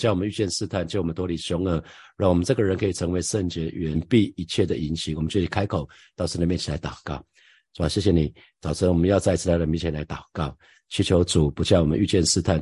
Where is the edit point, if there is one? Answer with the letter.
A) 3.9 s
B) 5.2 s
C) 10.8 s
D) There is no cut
A